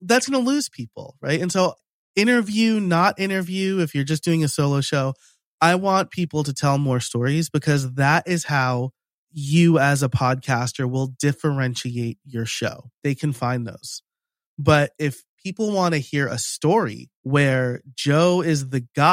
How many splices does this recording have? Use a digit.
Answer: 2